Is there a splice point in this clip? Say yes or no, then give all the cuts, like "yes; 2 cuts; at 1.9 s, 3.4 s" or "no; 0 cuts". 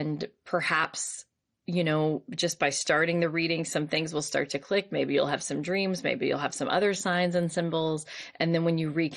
no; 0 cuts